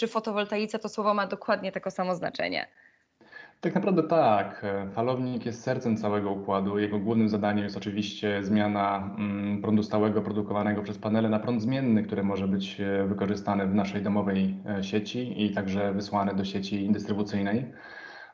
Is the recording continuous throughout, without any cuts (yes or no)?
yes